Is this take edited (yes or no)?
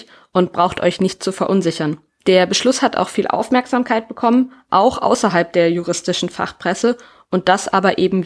yes